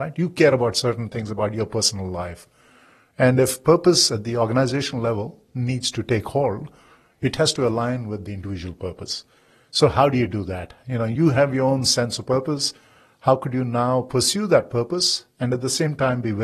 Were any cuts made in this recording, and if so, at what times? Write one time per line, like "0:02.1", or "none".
none

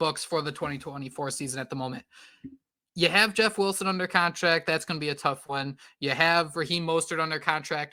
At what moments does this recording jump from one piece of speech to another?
none

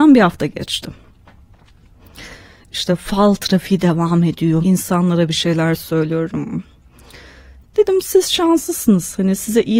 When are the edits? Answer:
0:04.6
0:07.6

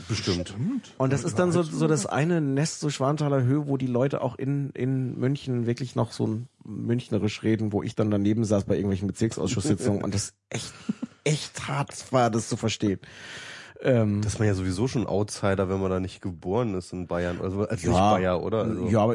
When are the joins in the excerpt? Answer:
none

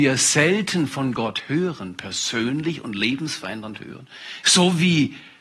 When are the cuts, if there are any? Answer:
0:04.4

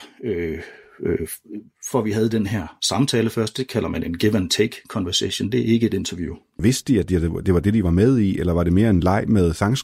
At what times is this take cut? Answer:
0:01.9
0:06.6

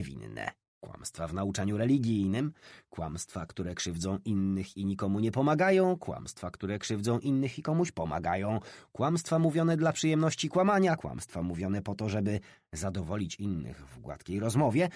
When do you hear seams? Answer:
none

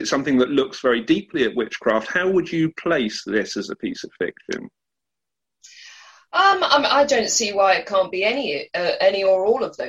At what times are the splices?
none

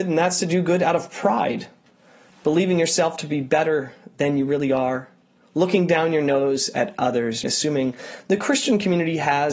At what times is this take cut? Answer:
0:07.4

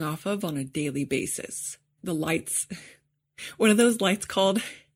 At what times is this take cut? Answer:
0:02.0

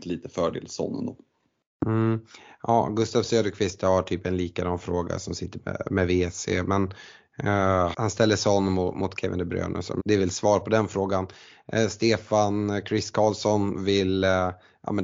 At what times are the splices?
0:07.9
0:10.0

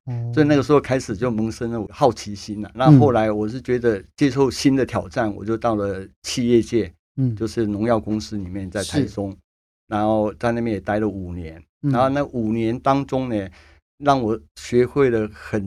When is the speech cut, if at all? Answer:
0:02.7

